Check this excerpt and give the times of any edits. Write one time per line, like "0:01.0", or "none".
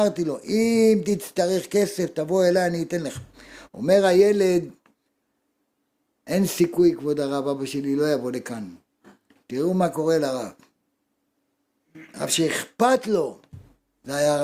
0:03.7
0:09.3